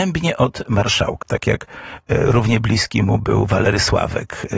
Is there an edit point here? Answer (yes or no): yes